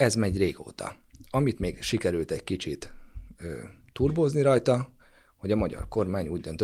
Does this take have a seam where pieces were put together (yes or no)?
no